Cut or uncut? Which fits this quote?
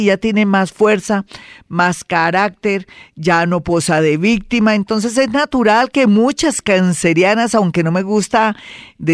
uncut